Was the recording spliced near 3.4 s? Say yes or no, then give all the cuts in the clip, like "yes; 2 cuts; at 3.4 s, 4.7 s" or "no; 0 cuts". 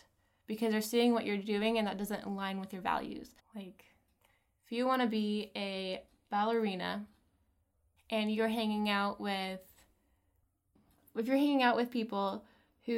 yes; 1 cut; at 3.4 s